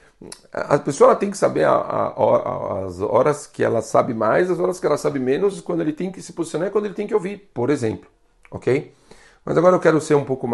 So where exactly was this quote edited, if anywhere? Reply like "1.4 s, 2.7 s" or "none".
none